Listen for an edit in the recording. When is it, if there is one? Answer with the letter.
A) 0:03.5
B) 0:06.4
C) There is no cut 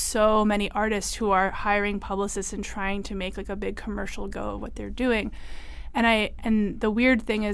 B